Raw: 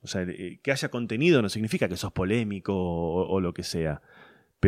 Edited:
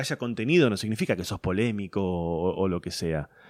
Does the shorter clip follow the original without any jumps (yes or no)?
yes